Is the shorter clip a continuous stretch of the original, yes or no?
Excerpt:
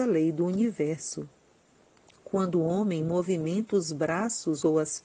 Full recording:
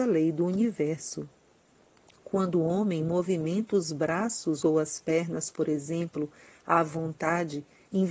yes